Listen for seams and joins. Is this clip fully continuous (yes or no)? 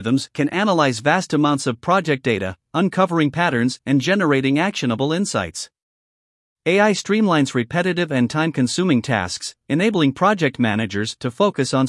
no